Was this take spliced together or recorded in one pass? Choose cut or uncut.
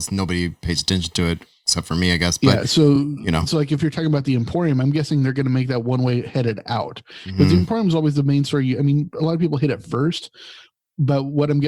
uncut